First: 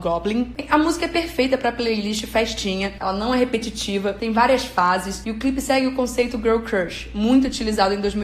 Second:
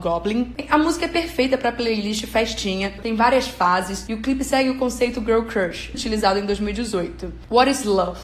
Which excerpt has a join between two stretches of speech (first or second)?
second